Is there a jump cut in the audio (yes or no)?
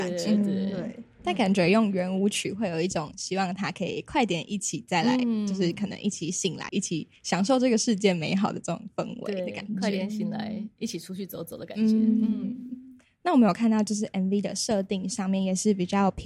yes